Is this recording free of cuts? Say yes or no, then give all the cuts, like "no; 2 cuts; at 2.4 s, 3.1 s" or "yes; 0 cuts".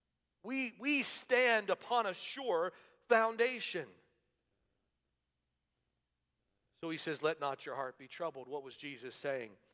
yes; 0 cuts